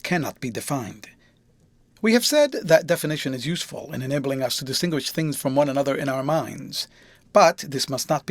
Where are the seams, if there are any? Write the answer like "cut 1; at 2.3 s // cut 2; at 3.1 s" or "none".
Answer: cut 1; at 1.9 s

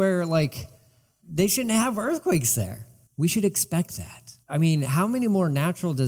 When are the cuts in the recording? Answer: cut 1; at 3.1 s // cut 2; at 4.4 s

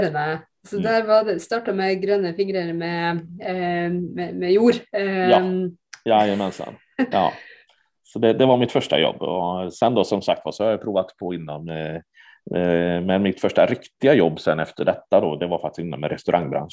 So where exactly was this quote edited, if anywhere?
cut 1; at 7.1 s

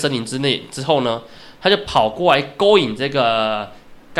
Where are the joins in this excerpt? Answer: none

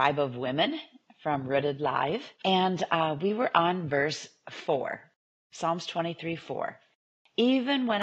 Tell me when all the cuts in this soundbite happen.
cut 1; at 2.3 s

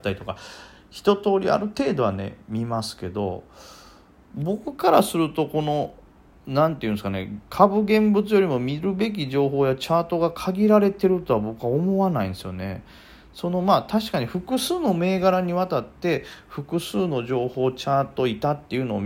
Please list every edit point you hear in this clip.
none

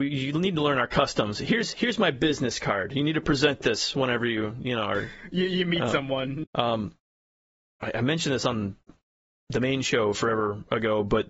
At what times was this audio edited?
cut 1; at 6.4 s

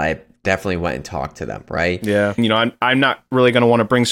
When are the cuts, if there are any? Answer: cut 1; at 2.4 s

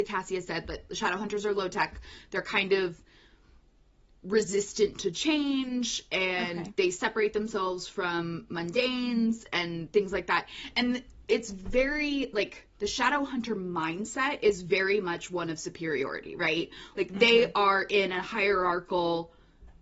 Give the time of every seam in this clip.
none

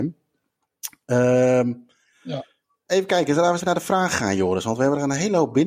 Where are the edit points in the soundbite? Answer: cut 1; at 3.6 s

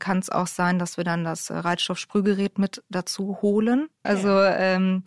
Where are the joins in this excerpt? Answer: cut 1; at 4.0 s

